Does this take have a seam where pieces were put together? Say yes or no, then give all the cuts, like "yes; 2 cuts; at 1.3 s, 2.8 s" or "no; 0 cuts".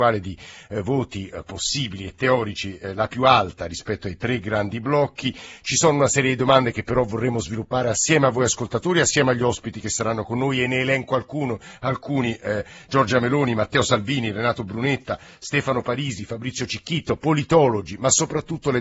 no; 0 cuts